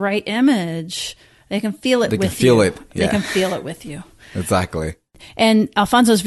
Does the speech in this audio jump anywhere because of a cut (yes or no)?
no